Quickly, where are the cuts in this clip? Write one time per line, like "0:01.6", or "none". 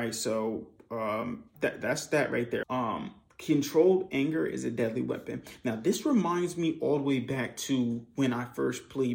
0:02.6